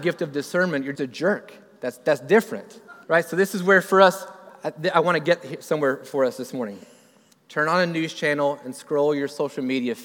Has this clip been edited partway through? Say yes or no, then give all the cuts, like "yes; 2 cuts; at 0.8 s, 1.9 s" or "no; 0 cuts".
yes; 3 cuts; at 0.9 s, 3.0 s, 7.3 s